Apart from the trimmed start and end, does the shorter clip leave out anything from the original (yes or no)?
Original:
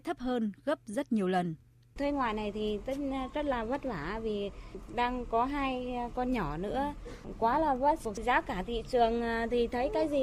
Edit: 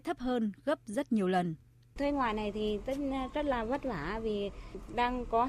no